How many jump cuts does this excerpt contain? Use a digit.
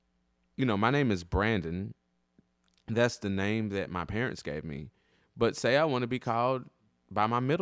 0